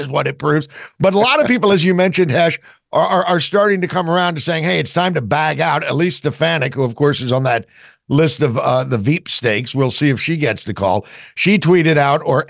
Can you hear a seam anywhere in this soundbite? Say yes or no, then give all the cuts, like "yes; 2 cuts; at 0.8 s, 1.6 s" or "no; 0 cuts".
no; 0 cuts